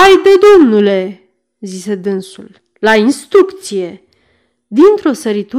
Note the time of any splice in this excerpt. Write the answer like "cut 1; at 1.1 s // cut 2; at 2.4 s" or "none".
none